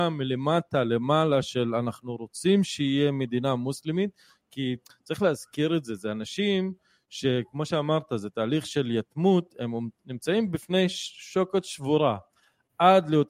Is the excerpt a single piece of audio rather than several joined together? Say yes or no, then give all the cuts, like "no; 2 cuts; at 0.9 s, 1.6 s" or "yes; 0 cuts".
yes; 0 cuts